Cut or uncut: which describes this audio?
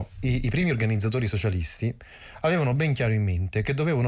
uncut